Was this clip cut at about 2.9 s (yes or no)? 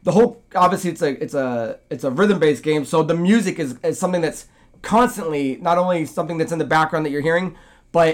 no